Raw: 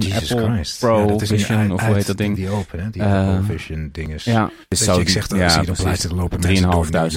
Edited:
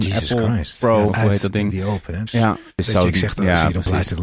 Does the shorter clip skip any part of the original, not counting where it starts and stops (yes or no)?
yes